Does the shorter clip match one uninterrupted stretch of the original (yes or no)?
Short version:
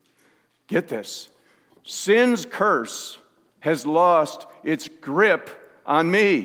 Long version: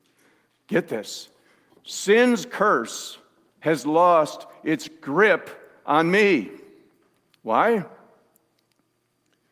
yes